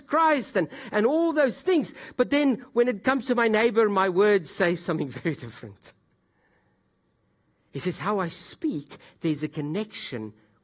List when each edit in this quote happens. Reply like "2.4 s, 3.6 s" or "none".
none